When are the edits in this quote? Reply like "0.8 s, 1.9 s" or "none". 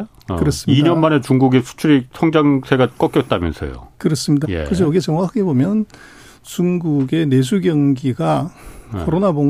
4.4 s